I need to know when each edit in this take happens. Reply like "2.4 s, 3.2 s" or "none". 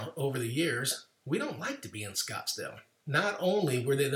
3.0 s